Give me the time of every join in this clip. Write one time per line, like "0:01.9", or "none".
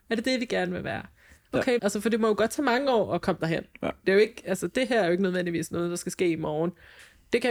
0:01.8